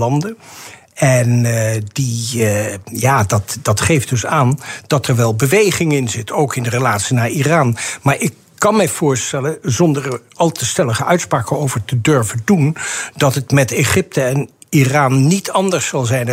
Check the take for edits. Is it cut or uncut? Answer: uncut